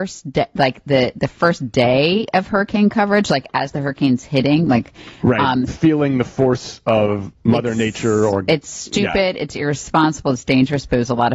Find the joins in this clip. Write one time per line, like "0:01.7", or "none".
0:07.4